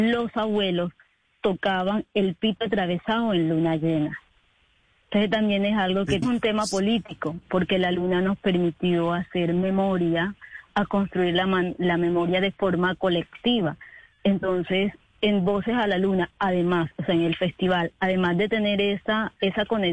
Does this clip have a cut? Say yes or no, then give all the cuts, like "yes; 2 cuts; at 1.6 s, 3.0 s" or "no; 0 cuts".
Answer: yes; 1 cut; at 6.2 s